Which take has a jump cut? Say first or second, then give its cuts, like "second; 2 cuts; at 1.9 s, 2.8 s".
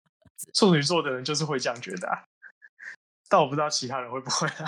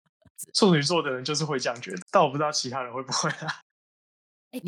second; 1 cut; at 2.0 s